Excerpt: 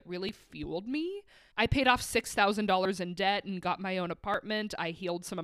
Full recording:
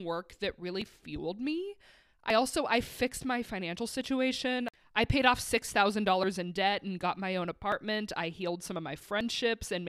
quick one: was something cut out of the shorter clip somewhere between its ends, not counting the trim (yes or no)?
yes